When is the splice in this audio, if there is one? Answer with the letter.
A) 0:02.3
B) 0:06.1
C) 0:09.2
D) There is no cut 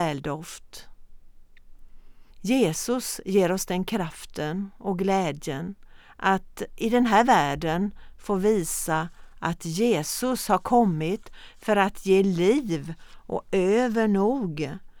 A